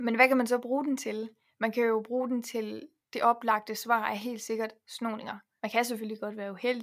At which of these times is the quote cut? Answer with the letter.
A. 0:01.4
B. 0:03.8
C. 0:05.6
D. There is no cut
C